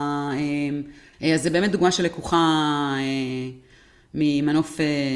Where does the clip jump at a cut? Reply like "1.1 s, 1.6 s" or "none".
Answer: 1.1 s